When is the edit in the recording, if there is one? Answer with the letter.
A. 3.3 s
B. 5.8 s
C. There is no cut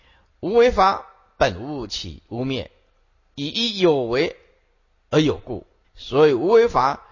B